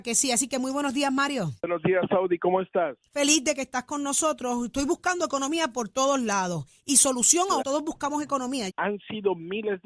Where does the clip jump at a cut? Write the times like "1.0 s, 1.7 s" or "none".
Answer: 1.6 s, 7.6 s, 8.7 s